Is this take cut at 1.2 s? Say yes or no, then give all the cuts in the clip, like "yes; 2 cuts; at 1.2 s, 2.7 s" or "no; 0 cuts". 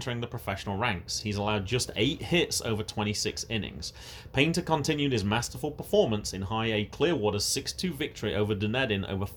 no; 0 cuts